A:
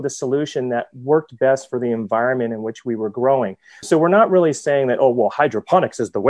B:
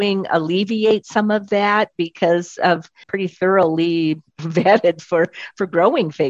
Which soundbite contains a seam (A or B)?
B